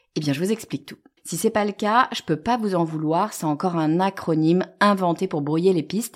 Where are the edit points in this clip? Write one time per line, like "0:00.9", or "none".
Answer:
0:01.2